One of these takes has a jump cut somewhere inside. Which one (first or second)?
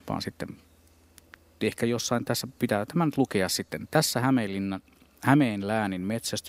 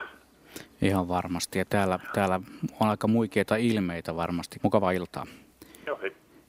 second